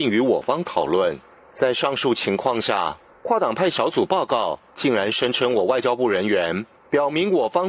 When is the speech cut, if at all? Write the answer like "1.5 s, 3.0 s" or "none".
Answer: 1.5 s, 3.1 s